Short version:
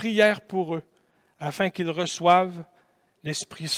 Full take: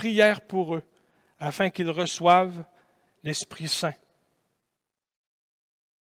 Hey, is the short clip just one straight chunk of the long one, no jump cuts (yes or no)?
yes